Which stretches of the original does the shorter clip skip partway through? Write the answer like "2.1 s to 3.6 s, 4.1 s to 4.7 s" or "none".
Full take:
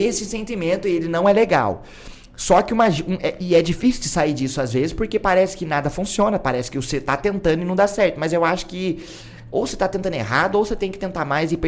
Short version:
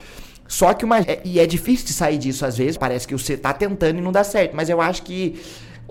2.9 s to 3.2 s, 4.9 s to 6.4 s